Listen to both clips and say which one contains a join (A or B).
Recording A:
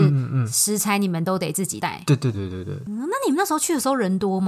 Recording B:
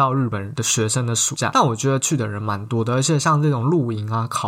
A